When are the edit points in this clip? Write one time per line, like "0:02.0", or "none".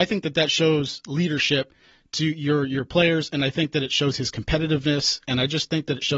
none